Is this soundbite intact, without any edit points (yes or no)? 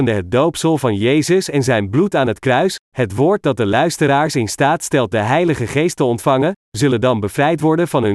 yes